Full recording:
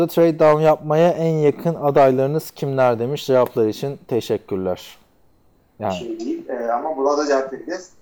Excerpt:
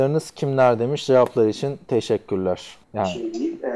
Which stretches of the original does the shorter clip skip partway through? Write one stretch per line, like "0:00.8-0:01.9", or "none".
0:05.0-0:05.7